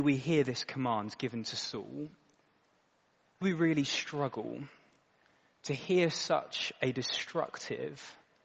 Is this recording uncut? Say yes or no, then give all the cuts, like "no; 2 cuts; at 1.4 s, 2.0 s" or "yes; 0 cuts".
no; 1 cut; at 3.4 s